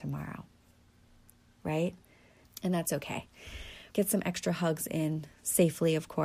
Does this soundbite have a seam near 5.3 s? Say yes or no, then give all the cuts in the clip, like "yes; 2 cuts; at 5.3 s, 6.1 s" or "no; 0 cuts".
no; 2 cuts; at 2.4 s, 3.9 s